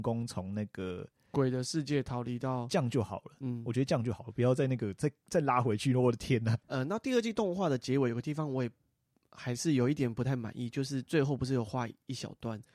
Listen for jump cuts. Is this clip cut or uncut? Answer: uncut